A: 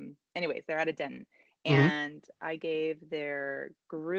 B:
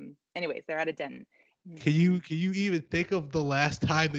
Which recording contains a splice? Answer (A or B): B